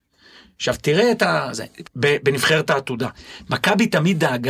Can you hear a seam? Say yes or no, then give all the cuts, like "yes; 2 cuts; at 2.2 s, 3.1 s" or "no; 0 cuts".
yes; 1 cut; at 1.9 s